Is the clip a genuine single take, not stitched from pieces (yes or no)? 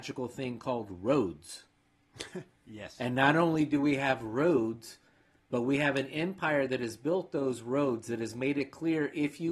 yes